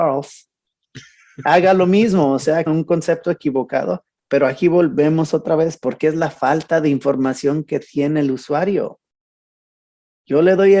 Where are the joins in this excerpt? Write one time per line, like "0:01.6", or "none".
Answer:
0:02.7